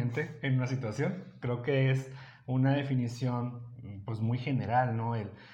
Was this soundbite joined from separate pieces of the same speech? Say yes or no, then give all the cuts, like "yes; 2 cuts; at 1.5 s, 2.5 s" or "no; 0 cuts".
no; 0 cuts